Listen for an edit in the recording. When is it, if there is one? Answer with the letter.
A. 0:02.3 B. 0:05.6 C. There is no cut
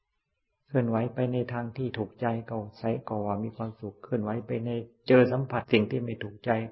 B